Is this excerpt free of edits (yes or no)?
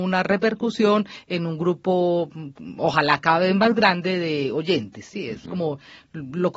yes